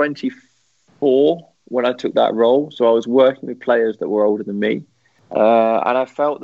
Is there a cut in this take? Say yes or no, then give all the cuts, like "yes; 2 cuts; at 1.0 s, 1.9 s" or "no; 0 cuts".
no; 0 cuts